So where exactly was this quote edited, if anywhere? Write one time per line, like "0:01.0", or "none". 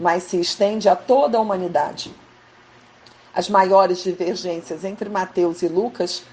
none